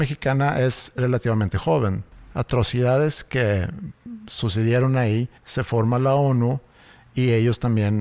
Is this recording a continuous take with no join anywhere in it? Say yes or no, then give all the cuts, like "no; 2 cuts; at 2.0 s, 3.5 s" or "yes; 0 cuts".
no; 2 cuts; at 2.3 s, 5.4 s